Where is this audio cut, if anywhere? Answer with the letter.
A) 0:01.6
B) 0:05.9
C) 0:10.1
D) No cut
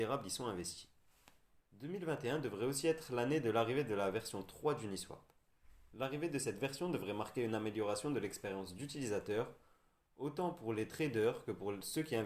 A